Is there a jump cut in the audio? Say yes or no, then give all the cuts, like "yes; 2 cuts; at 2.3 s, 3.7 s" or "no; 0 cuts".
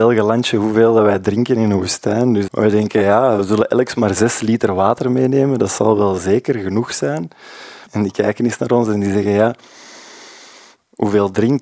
yes; 2 cuts; at 2.5 s, 7.9 s